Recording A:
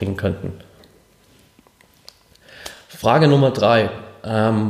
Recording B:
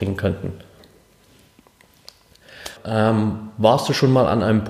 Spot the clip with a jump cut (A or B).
B